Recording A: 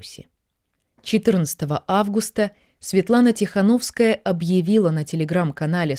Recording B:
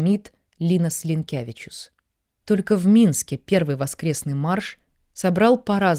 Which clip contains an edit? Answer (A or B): B